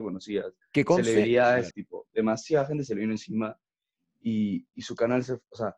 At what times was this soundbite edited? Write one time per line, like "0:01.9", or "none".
0:01.7